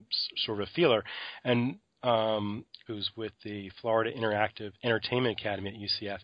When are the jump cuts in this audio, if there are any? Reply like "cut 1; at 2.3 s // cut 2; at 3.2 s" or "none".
cut 1; at 2.9 s // cut 2; at 4.8 s

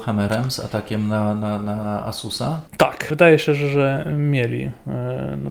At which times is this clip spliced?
none

